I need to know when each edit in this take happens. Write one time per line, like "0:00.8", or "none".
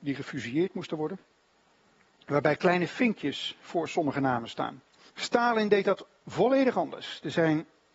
0:05.1

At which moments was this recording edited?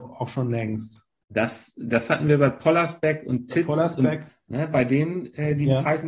0:04.3

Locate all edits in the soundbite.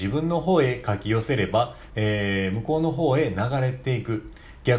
0:01.9

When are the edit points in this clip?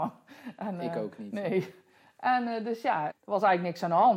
0:03.1

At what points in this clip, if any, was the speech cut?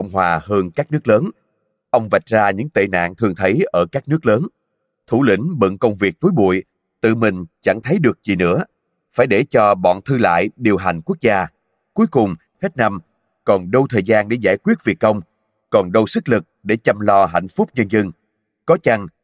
0:12.5

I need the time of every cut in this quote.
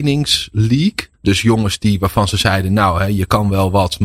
0:01.1

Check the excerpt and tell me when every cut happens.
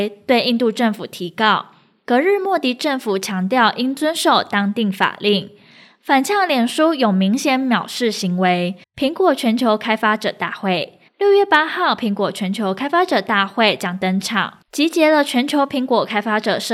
0:08.8
0:11.1

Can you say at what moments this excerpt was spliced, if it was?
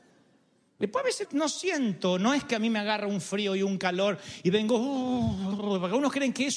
0:01.2

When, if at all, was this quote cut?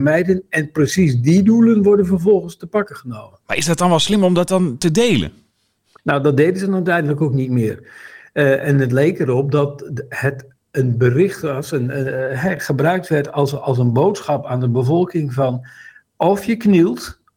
none

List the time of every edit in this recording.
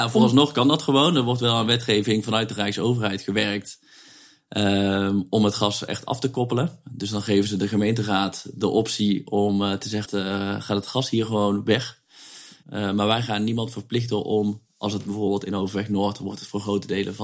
0:10.0
0:12.6

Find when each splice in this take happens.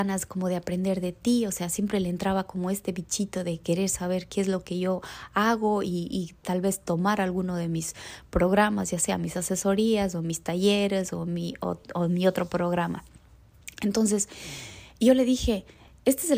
none

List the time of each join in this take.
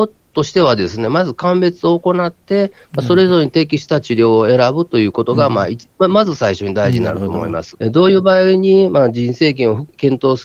0:07.7

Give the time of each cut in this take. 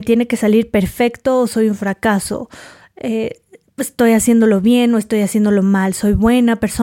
none

